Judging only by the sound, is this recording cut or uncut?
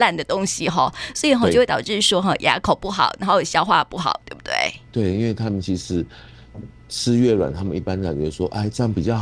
cut